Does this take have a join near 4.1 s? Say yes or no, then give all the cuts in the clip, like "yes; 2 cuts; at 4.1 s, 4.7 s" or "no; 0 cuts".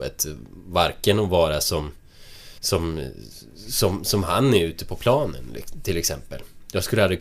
no; 1 cut; at 2.6 s